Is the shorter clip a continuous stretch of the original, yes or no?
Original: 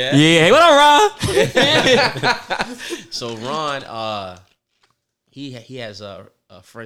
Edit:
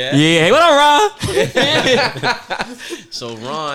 yes